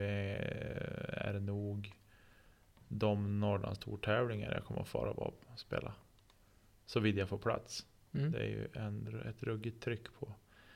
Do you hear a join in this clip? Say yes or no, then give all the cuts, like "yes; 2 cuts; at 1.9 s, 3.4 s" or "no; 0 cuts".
no; 0 cuts